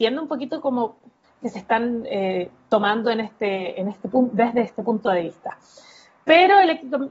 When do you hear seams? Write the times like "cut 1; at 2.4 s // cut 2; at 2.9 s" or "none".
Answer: cut 1; at 1.2 s

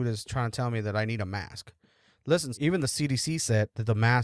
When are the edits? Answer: cut 1; at 2.5 s

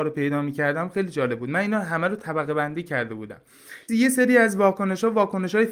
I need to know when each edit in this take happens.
cut 1; at 3.9 s

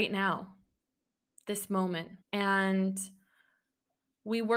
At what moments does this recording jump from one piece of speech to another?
cut 1; at 2.2 s

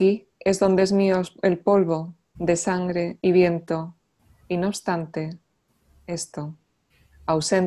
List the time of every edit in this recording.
cut 1; at 2.3 s

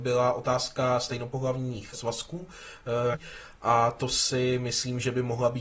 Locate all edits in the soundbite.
cut 1; at 1.9 s // cut 2; at 3.1 s

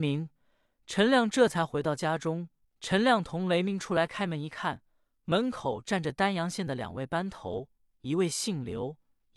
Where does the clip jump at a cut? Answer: cut 1; at 2.6 s

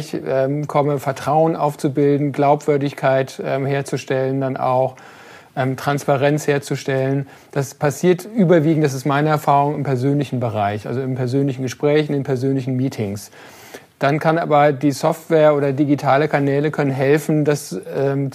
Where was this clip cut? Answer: none

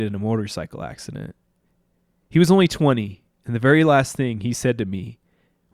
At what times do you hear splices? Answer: none

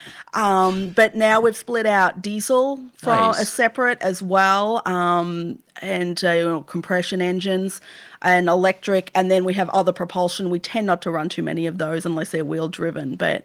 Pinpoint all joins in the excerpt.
none

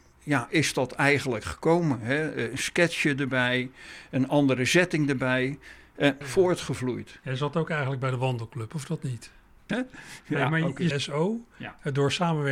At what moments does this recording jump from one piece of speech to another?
cut 1; at 6.2 s // cut 2; at 9.7 s // cut 3; at 10.9 s

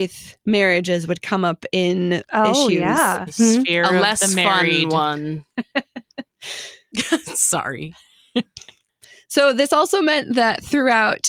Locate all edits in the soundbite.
cut 1; at 3.3 s

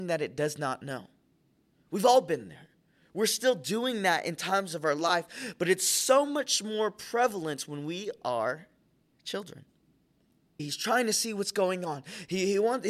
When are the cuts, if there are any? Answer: cut 1; at 10.6 s

